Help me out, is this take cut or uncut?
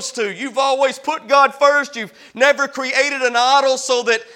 uncut